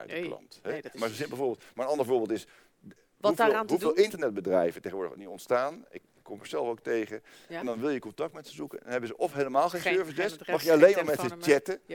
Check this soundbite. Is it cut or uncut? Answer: uncut